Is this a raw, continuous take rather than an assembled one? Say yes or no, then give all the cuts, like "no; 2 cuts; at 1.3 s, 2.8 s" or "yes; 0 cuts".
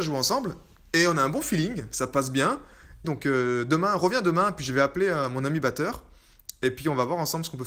no; 1 cut; at 3.0 s